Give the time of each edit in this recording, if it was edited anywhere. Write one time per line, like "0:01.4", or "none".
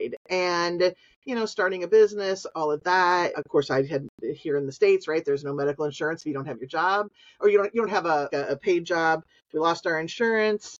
0:03.3
0:08.3

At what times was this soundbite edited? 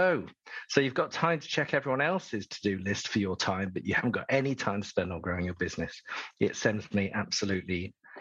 none

